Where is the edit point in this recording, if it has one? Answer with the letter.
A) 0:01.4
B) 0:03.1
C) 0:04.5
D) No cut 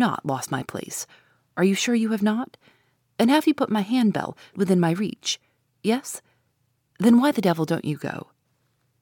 C